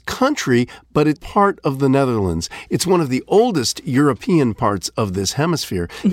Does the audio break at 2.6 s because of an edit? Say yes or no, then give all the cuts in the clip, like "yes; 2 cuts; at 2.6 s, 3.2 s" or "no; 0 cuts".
no; 1 cut; at 1.2 s